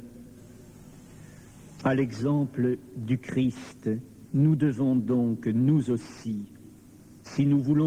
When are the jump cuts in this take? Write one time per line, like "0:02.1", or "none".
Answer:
0:01.8
0:04.3